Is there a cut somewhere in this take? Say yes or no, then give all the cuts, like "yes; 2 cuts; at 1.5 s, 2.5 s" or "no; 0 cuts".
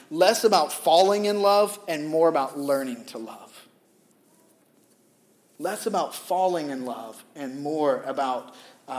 no; 0 cuts